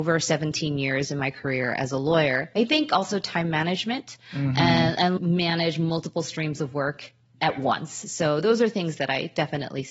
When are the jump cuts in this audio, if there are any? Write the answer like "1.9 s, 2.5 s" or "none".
5.2 s